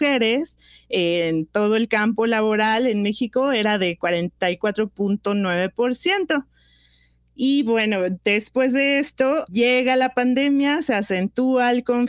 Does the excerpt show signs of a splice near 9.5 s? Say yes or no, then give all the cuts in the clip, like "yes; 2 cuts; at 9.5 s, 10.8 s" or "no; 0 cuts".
yes; 1 cut; at 9.5 s